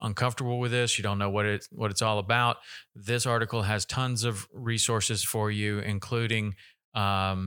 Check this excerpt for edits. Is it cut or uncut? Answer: uncut